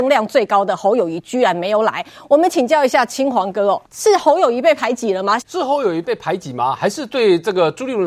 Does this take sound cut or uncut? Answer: cut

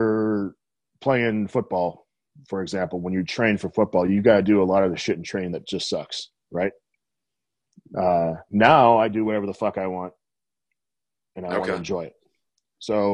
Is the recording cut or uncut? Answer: cut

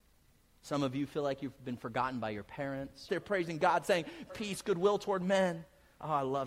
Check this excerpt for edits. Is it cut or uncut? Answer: cut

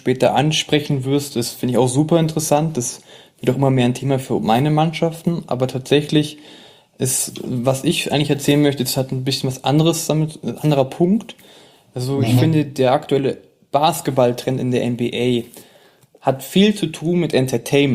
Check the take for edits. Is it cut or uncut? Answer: uncut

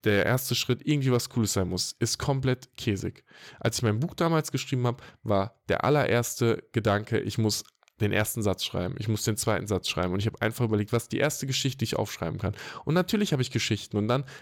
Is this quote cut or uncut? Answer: uncut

